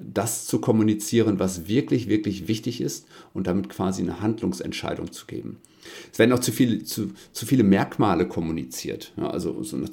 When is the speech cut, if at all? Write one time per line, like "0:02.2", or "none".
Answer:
none